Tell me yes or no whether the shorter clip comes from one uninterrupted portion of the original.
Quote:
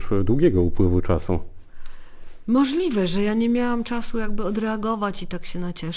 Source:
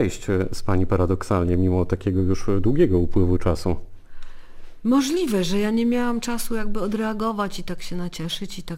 yes